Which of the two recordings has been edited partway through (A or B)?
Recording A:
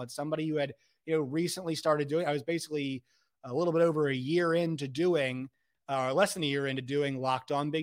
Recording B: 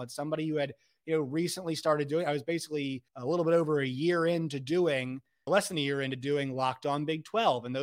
B